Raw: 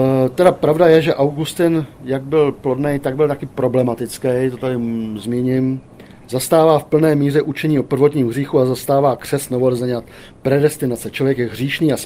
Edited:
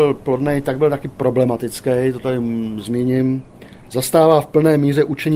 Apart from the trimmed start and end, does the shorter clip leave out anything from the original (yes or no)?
no